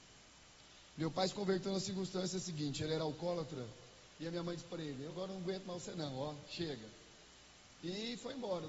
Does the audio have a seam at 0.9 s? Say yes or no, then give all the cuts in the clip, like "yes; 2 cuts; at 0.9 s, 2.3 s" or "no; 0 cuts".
no; 2 cuts; at 5.1 s, 7.8 s